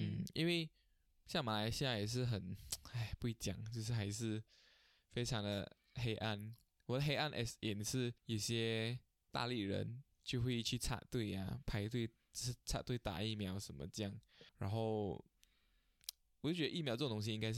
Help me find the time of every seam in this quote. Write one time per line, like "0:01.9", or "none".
0:08.2
0:14.5